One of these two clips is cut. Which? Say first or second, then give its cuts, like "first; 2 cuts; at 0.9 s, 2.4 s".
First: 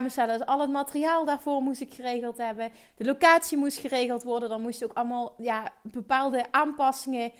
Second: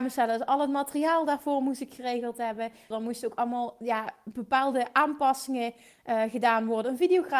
second; 1 cut; at 2.9 s